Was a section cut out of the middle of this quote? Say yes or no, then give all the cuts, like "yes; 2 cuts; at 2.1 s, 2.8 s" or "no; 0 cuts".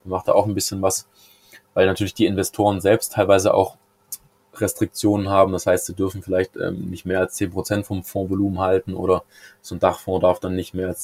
no; 0 cuts